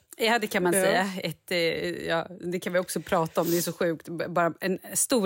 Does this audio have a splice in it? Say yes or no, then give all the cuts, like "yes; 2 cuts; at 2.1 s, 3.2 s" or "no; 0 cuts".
no; 0 cuts